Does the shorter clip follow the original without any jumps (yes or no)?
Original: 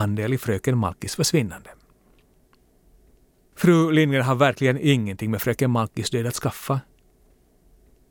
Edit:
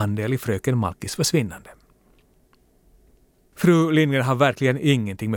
yes